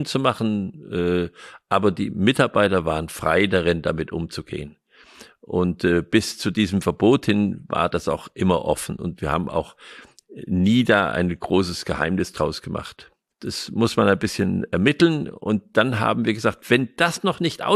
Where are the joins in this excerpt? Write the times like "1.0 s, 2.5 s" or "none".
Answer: 13.3 s